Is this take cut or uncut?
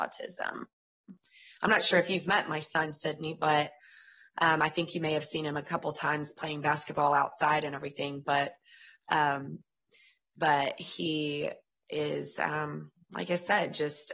uncut